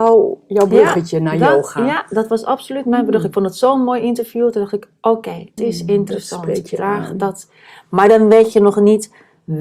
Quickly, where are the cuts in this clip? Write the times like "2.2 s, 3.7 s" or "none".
5.6 s